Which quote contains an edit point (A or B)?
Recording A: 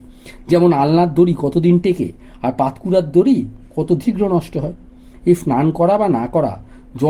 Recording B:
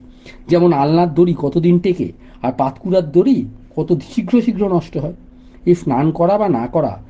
A